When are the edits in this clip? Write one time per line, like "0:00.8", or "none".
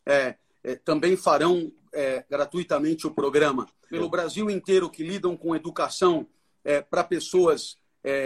0:03.9